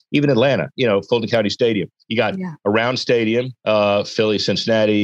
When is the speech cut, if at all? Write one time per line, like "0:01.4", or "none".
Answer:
0:03.6